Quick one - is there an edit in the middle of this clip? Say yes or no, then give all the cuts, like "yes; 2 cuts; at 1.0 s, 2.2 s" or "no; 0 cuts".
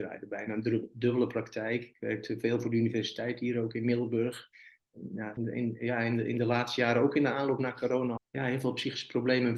yes; 2 cuts; at 5.4 s, 8.2 s